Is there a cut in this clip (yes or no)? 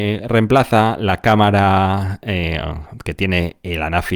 no